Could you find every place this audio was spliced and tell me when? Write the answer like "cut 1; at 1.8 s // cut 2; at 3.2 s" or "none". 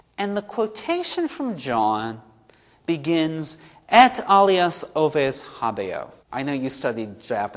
cut 1; at 6.2 s